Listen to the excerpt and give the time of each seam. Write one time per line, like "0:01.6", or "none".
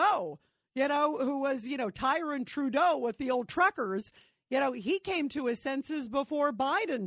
none